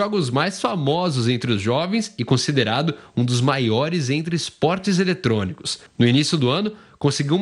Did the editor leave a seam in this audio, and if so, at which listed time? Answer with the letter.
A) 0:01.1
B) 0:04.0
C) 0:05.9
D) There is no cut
C